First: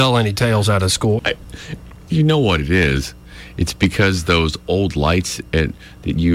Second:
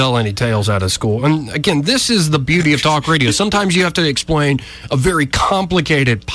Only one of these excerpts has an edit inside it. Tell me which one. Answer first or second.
first